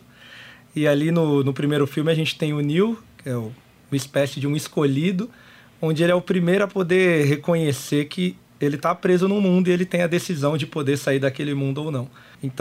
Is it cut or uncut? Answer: uncut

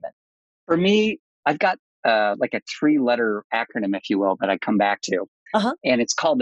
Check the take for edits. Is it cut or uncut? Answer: uncut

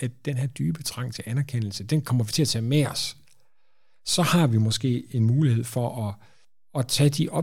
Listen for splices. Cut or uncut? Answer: uncut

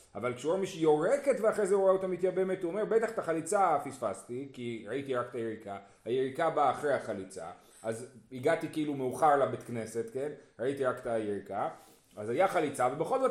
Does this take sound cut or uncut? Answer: uncut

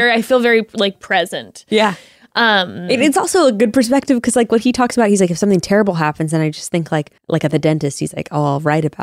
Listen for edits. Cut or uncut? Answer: cut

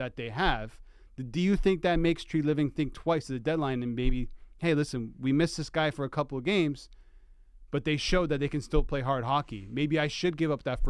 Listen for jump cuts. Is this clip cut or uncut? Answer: uncut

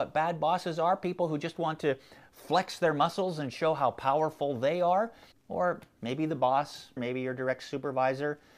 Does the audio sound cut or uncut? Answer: cut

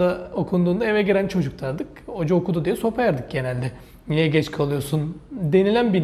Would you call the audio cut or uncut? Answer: uncut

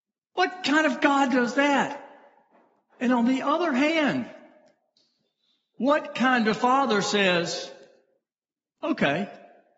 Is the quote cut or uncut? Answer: uncut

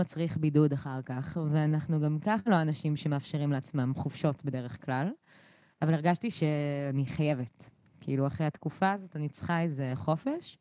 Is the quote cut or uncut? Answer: uncut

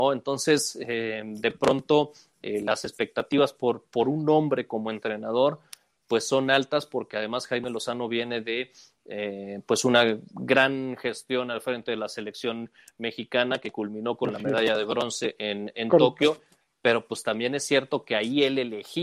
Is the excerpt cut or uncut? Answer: uncut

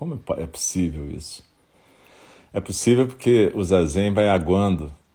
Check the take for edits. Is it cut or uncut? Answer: uncut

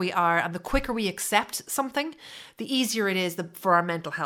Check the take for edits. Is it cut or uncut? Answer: uncut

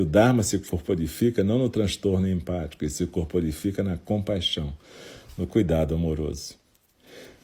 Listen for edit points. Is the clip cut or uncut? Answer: uncut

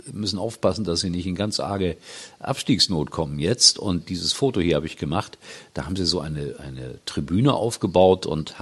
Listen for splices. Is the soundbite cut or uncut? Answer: uncut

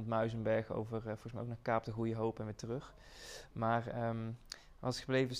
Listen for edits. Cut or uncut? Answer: uncut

